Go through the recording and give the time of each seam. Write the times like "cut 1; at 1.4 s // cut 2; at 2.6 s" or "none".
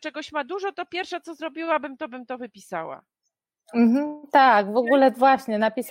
none

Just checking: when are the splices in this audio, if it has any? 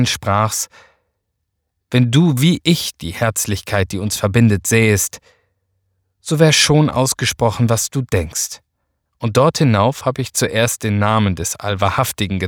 cut 1; at 9.1 s

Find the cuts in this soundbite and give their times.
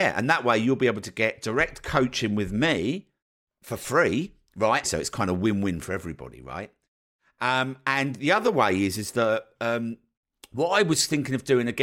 cut 1; at 4.8 s

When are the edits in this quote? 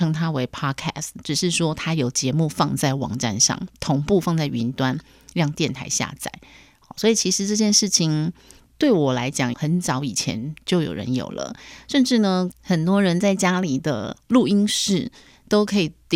cut 1; at 9.5 s // cut 2; at 12.5 s

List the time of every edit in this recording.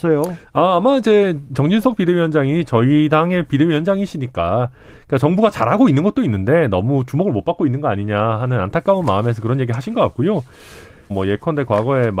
cut 1; at 11.1 s

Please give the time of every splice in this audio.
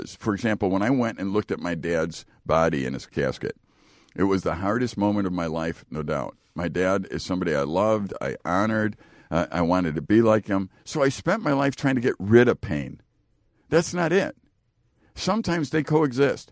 cut 1; at 10.8 s

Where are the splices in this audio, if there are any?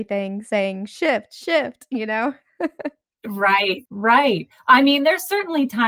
cut 1; at 3.9 s

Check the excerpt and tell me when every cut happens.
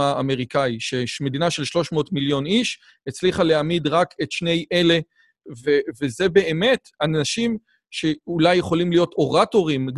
cut 1; at 5.6 s

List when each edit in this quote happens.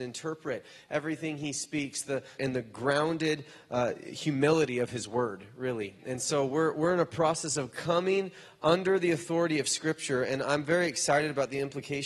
cut 1; at 2.4 s

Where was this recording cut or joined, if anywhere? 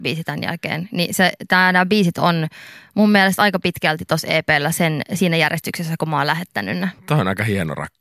cut 1; at 7.0 s

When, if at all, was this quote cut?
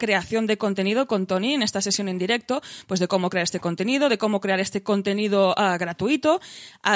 none

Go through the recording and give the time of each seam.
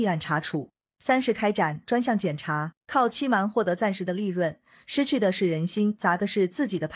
cut 1; at 2.8 s

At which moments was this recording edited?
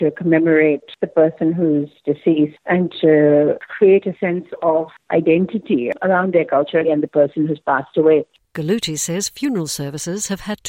cut 1; at 6.8 s

